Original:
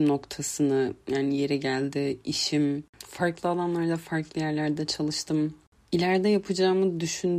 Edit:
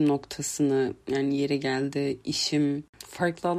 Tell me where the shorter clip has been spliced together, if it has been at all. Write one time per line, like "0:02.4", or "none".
none